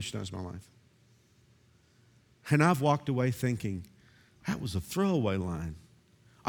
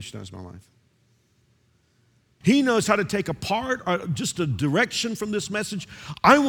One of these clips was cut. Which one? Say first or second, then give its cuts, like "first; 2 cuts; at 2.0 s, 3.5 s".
second; 2 cuts; at 2.4 s, 3.8 s